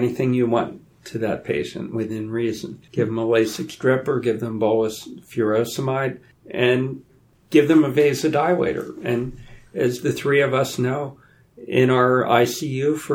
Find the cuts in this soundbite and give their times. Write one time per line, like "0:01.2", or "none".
0:02.9